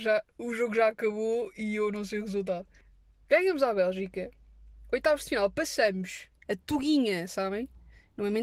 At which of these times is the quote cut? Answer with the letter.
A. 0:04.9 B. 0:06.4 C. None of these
B